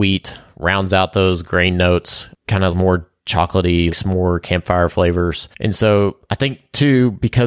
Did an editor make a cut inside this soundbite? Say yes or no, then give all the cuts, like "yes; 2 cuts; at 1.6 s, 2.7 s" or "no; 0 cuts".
yes; 3 cuts; at 2.7 s, 3.9 s, 5.5 s